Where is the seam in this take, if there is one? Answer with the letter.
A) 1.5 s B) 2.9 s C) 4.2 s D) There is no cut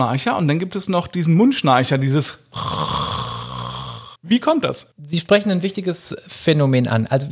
C